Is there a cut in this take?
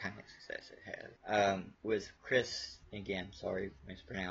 no; 0 cuts

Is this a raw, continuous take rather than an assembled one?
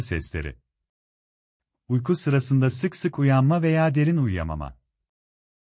yes; 0 cuts

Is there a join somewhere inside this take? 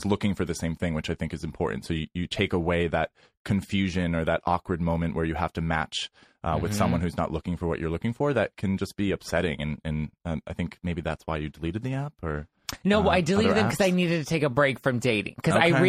no; 0 cuts

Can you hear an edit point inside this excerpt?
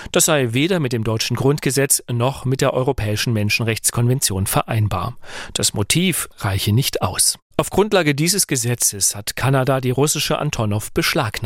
yes; 2 cuts; at 6.3 s, 7.5 s

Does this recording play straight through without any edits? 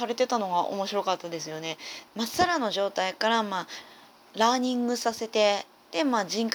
no; 1 cut; at 2.1 s

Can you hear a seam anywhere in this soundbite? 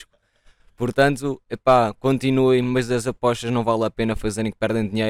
no; 0 cuts

